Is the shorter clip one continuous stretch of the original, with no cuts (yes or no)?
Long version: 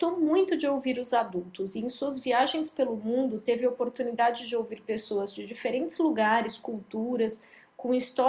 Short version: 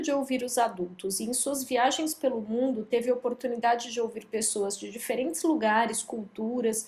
yes